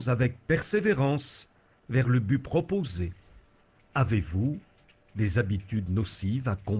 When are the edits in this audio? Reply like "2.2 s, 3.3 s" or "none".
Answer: 3.8 s